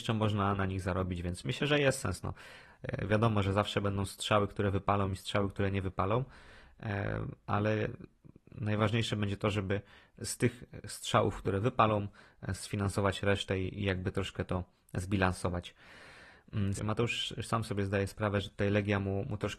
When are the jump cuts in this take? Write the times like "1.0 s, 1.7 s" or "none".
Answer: 16.8 s